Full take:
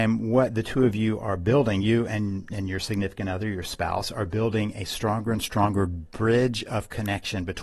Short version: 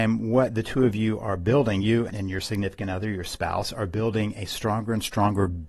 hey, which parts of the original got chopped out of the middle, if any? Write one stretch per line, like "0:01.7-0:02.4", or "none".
0:02.1-0:02.5